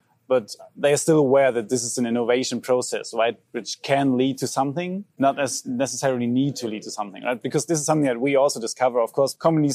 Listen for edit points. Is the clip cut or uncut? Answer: uncut